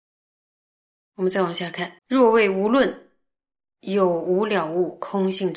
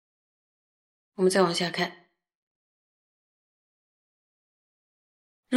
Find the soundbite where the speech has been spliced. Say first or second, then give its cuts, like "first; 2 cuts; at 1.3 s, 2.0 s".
first; 1 cut; at 2.0 s